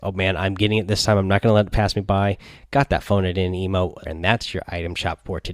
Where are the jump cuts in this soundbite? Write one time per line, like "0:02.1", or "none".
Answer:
0:04.0